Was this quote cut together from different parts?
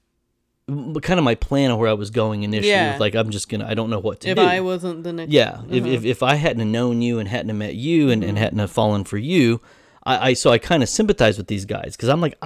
no; 0 cuts

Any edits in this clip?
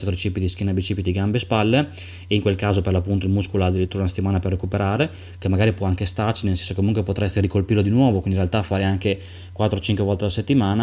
no; 0 cuts

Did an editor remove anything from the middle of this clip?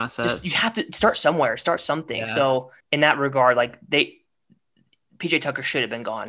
yes; 1 cut; at 2.8 s

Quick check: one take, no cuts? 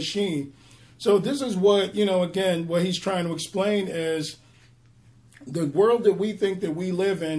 yes; 0 cuts

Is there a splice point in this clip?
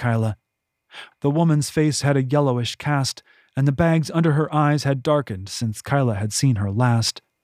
yes; 1 cut; at 1.1 s

